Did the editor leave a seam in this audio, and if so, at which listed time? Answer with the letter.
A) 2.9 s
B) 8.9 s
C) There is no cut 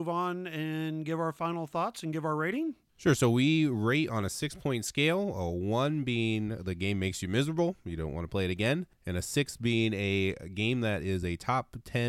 A